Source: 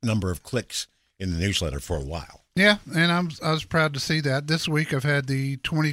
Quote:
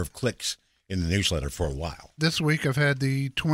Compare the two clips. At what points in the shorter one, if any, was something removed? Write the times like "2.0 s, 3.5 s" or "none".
2.2 s